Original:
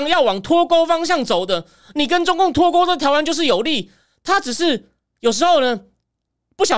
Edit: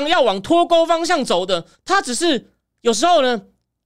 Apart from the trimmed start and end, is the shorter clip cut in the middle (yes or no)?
yes